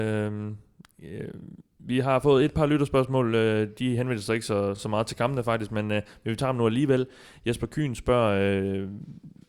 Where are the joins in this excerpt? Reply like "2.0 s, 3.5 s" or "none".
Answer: none